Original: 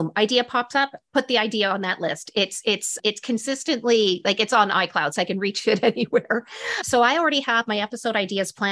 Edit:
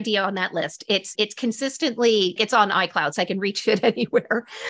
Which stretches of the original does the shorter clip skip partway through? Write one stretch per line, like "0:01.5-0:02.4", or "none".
0:02.6-0:03.0
0:04.2-0:04.4